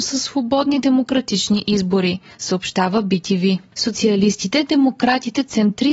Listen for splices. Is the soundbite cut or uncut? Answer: uncut